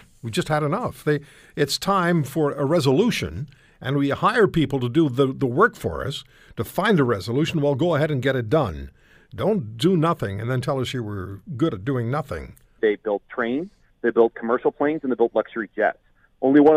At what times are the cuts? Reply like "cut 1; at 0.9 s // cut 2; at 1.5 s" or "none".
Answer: cut 1; at 12.8 s